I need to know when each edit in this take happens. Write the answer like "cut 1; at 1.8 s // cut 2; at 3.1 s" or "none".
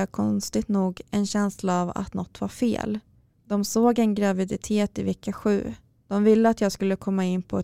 cut 1; at 3.3 s // cut 2; at 6.0 s